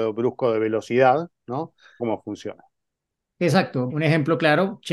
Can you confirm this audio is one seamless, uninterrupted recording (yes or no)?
no